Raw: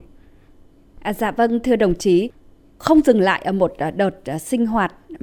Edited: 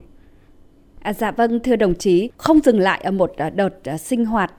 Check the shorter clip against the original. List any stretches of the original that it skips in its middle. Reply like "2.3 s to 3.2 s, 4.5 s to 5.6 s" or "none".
2.3 s to 2.8 s